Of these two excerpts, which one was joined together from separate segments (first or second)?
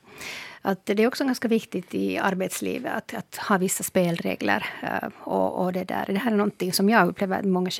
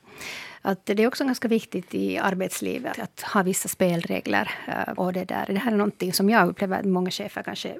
second